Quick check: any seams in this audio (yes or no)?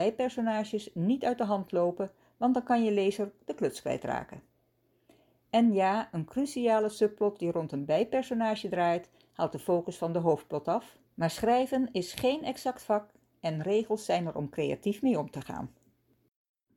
yes